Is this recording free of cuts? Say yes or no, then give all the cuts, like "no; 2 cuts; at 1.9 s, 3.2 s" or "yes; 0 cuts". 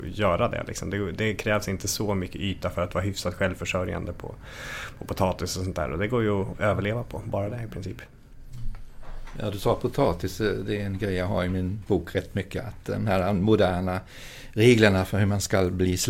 yes; 0 cuts